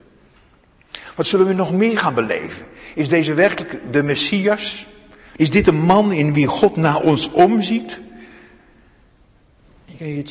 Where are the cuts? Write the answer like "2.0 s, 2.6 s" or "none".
5.4 s